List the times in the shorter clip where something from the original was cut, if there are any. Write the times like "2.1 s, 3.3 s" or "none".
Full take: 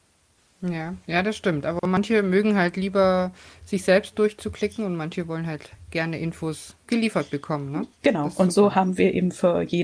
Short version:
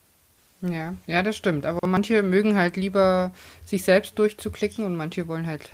none